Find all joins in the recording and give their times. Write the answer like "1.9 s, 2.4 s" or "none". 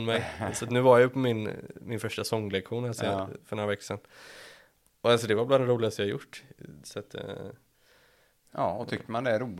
6.8 s